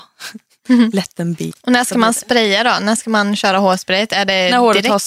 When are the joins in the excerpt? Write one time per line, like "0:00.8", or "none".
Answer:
none